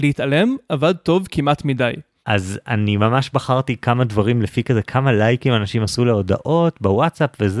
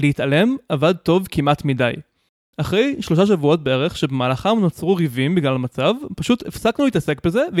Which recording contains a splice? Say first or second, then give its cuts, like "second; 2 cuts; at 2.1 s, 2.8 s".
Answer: first; 1 cut; at 2.2 s